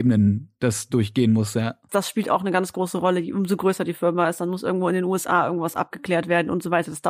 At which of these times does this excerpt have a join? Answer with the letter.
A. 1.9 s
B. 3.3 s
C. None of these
A